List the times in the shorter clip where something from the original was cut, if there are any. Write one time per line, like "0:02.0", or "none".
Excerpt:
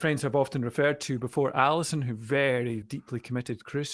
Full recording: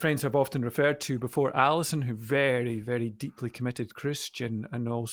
0:02.8